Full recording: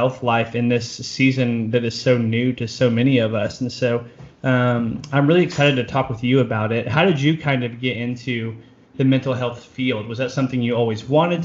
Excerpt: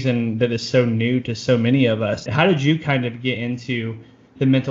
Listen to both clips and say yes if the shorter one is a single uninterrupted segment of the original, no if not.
no